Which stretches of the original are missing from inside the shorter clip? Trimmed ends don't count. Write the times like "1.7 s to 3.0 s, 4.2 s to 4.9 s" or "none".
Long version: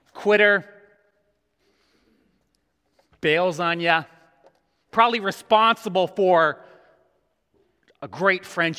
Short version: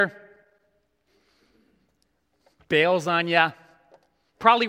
none